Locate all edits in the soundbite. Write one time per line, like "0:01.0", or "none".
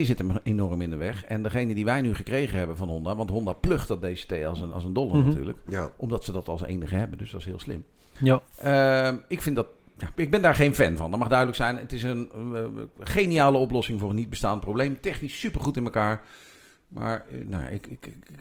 0:04.7
0:10.1